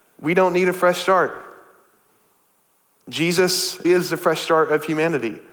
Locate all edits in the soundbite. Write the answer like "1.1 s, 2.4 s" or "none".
3.8 s